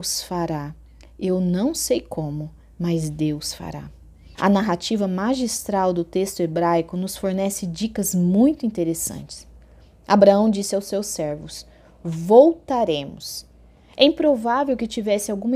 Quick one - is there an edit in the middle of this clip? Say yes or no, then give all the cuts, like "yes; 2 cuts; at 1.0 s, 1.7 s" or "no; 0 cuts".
yes; 1 cut; at 4.3 s